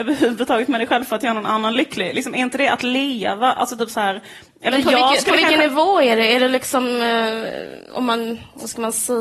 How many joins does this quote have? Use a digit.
0